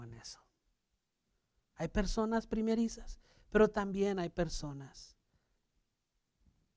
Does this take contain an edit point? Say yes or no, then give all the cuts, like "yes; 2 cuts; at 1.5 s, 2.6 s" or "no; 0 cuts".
yes; 1 cut; at 1.7 s